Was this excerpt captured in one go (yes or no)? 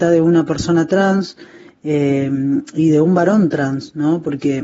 yes